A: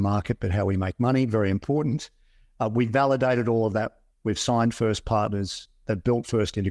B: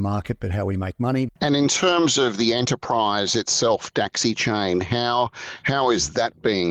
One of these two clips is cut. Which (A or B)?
B